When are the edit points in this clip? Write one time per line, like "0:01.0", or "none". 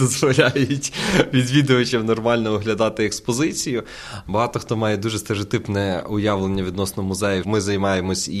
0:04.3
0:07.4